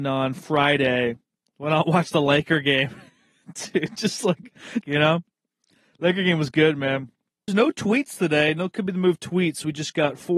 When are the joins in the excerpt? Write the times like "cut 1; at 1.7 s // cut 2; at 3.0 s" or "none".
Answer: cut 1; at 4.8 s // cut 2; at 7.5 s